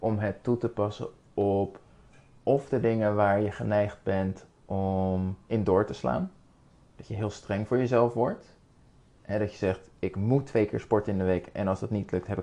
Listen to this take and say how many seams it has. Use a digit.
0